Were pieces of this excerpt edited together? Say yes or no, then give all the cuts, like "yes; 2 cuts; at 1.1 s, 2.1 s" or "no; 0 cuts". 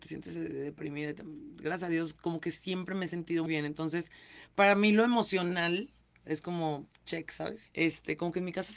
yes; 2 cuts; at 3.5 s, 7.7 s